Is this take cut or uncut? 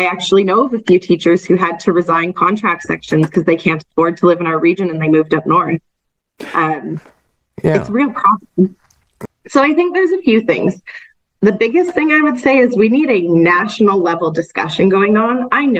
cut